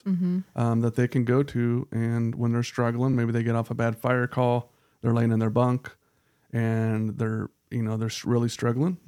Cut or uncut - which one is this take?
uncut